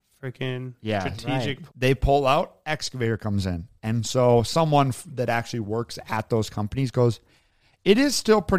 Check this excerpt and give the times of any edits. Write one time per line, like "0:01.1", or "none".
0:01.7